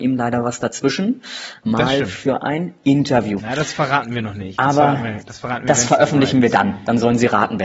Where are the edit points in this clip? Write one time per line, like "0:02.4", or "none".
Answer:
0:01.6
0:03.4